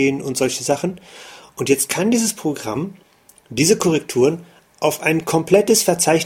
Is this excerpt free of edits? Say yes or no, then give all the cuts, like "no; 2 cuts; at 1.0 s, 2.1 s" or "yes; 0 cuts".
yes; 0 cuts